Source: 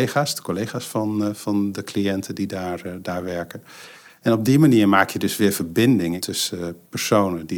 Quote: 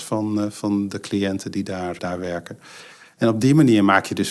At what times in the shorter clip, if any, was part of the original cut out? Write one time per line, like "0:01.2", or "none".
0:02.0